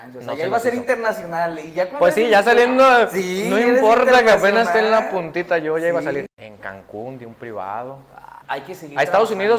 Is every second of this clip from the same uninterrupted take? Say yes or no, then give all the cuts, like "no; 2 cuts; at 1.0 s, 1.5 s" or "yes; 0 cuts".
no; 2 cuts; at 6.3 s, 8.4 s